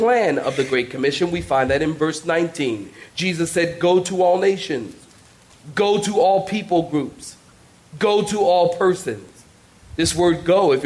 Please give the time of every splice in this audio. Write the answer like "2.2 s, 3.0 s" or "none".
none